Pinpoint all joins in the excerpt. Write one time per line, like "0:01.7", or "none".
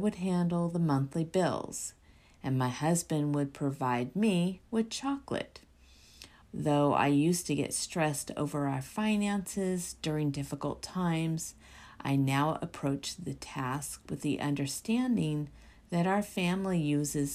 0:06.4